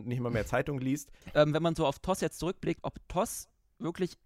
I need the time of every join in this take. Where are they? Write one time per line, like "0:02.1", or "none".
0:01.2
0:02.8